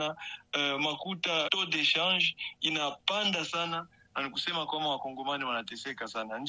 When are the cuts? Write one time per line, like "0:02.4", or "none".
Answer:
0:01.5